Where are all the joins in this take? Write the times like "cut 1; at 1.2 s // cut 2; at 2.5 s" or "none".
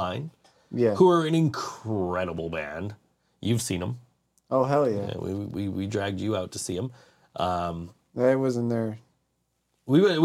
none